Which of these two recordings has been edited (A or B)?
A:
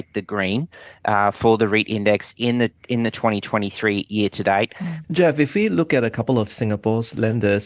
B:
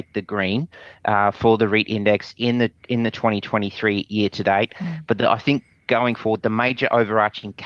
A